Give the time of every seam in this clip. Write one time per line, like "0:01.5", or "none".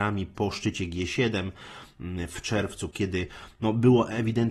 0:02.9

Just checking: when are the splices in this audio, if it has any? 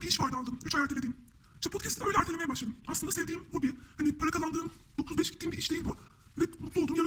none

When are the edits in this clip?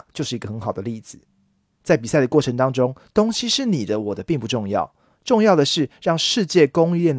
0:01.8

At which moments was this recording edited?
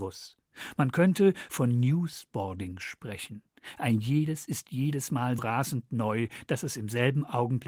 0:01.5
0:05.4

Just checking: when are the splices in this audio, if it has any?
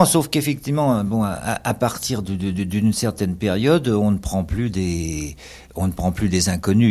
none

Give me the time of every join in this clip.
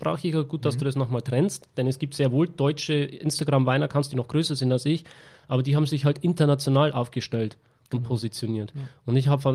none

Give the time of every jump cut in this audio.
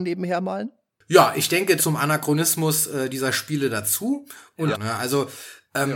0:01.8
0:04.7

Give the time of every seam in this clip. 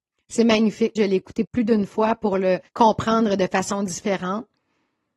0:01.0
0:02.7

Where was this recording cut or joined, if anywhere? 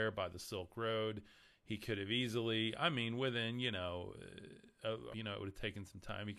0:05.1

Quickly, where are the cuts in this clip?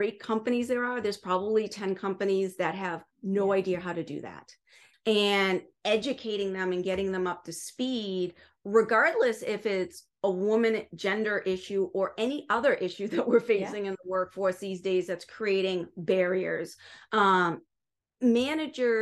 0:04.9

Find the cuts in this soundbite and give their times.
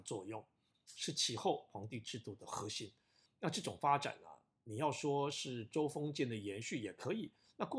0:03.3

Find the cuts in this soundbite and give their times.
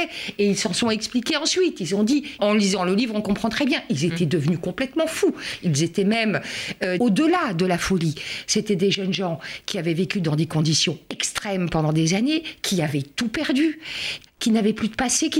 0:02.4
0:07.0
0:14.3

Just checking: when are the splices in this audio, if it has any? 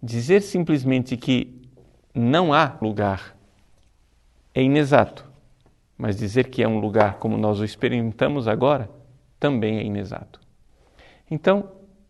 0:02.8

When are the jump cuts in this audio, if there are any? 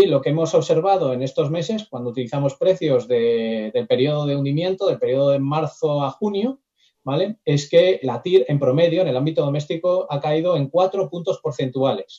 0:08.0
0:10.1

